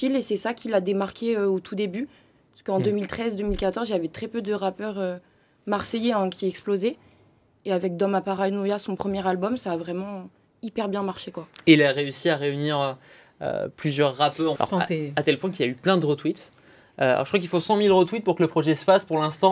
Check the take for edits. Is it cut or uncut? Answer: cut